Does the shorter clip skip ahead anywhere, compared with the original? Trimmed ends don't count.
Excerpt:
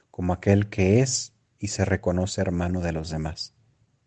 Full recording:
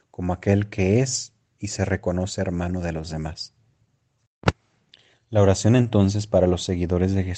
no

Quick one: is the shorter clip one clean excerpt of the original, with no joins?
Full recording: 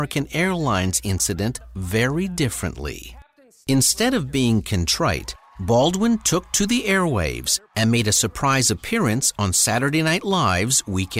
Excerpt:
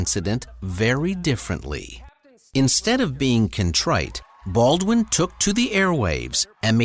yes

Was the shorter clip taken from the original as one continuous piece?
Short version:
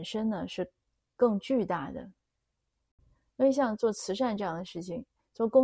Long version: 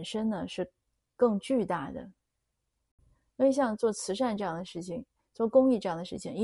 yes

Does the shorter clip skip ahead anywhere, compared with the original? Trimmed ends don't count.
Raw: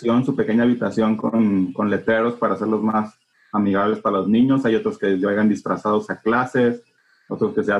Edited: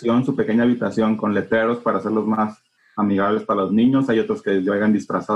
yes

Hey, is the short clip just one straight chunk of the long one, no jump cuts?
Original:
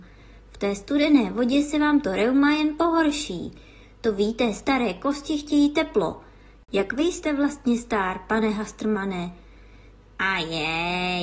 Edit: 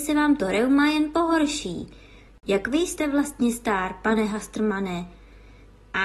no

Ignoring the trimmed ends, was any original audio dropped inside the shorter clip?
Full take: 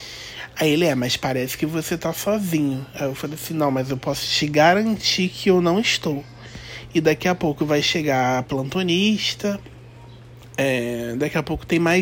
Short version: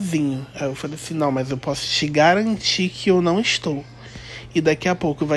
no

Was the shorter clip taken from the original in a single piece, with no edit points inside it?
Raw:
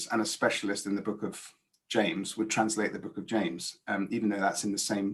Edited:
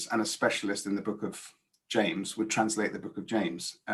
yes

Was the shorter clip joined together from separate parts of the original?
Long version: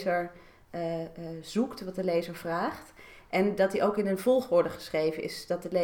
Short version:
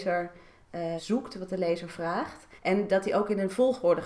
yes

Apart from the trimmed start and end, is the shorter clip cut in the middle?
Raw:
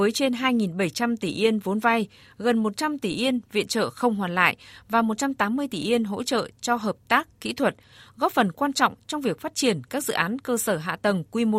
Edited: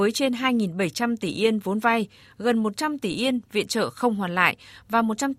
no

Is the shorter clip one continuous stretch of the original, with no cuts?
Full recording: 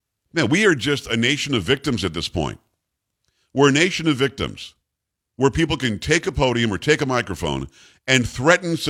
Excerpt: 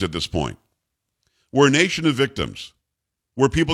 yes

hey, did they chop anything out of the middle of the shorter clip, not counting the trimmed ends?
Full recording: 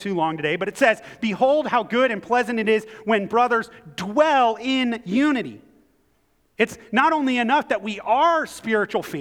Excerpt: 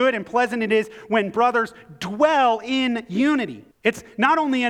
yes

